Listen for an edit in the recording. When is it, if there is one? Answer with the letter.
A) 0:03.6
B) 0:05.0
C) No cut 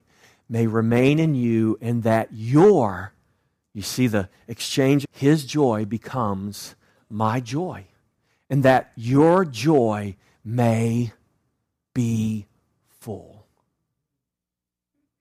B